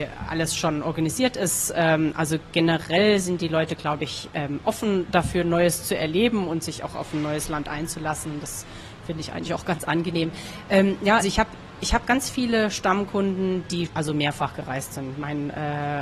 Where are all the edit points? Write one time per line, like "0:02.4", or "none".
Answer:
0:11.2
0:13.9